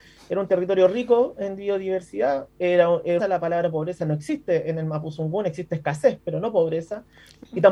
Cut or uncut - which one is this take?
cut